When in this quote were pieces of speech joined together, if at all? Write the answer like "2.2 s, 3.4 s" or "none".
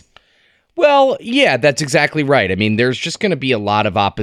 none